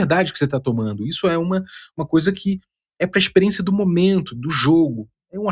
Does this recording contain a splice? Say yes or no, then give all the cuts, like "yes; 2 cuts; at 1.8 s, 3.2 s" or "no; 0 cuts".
no; 0 cuts